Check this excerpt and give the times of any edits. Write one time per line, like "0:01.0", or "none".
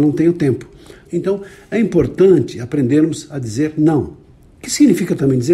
0:01.1